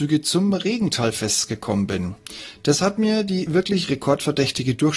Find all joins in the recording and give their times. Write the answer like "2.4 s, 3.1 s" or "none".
none